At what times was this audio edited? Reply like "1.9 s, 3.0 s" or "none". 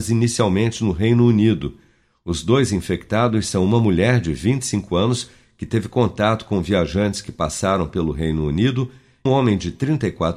9.3 s